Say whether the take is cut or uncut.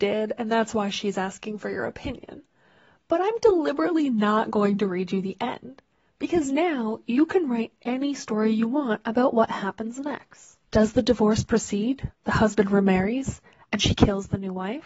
cut